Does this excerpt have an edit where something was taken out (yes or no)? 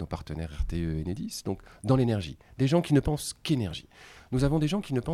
no